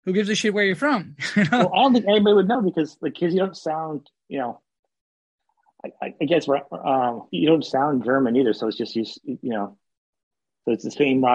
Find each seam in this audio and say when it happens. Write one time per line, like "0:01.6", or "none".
0:07.3